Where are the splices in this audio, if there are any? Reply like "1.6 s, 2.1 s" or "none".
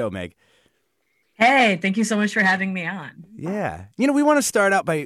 none